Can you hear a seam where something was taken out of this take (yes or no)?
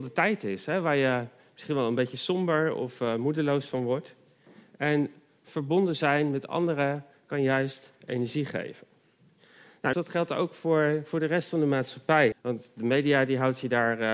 yes